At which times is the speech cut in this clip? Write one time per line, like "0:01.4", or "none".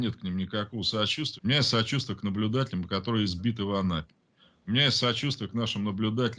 0:01.4